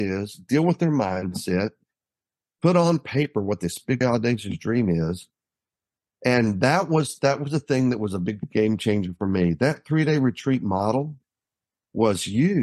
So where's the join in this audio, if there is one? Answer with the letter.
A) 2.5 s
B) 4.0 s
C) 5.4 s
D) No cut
B